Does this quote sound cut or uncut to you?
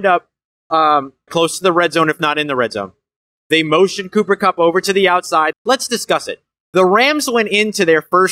cut